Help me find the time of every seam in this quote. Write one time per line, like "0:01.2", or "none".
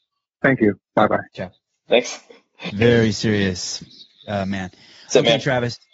0:02.7